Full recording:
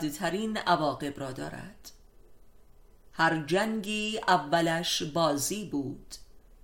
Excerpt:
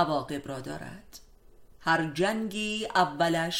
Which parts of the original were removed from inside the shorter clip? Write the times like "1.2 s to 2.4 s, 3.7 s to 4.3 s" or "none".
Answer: 2.4 s to 3.0 s